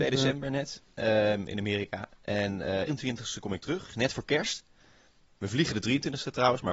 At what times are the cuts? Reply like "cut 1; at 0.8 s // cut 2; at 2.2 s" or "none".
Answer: cut 1; at 2.9 s